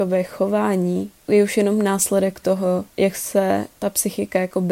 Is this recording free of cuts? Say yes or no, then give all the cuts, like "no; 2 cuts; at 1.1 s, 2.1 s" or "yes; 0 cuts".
yes; 0 cuts